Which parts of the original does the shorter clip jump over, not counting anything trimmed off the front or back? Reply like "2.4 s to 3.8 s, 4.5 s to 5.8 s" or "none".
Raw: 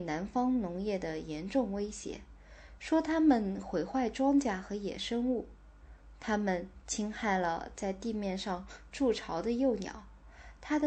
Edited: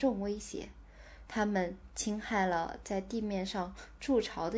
2.8 s to 6.2 s